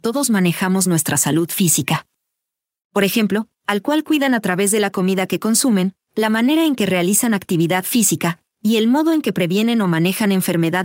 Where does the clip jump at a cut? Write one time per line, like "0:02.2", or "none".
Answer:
0:03.5